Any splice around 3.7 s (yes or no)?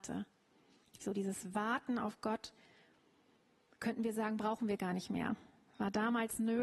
no